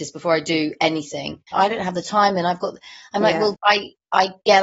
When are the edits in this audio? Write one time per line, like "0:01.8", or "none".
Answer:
0:01.5
0:03.5